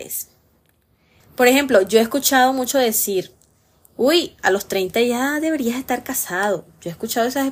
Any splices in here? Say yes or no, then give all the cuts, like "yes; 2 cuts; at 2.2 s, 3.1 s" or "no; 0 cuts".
yes; 1 cut; at 1.2 s